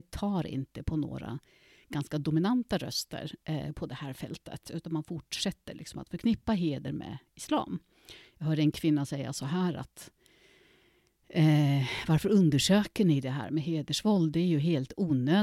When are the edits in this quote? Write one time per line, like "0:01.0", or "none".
none